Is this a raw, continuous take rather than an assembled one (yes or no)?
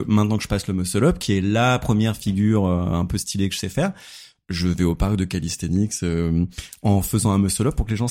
yes